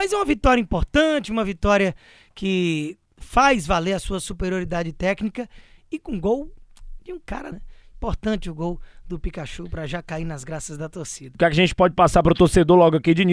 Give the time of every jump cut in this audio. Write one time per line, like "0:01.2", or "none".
0:07.5
0:11.3